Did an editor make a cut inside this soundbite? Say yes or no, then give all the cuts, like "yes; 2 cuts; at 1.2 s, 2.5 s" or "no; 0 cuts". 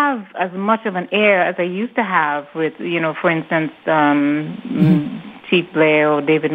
no; 0 cuts